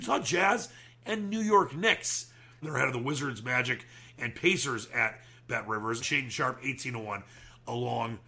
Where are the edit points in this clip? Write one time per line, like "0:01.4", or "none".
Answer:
0:02.6
0:06.0

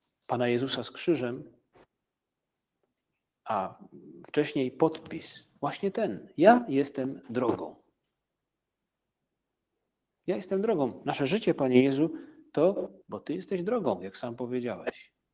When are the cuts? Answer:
0:13.0

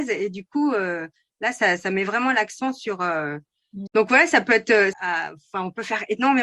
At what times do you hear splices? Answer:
0:03.9
0:04.9

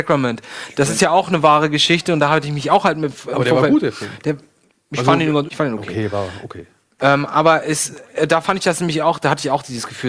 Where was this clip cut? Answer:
0:05.5

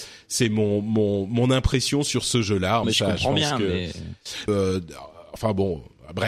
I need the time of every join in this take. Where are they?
0:02.8
0:04.5

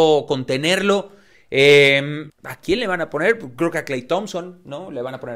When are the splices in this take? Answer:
0:02.3

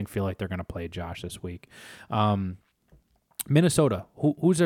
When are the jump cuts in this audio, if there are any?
none

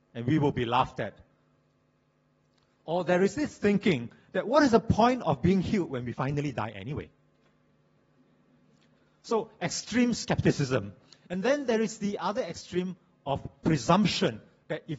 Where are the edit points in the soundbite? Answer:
none

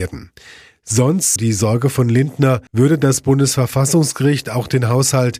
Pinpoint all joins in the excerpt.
0:01.4
0:02.7

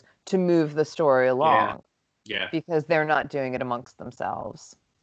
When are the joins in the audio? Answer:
none

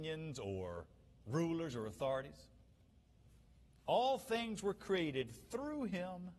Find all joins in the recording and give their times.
none

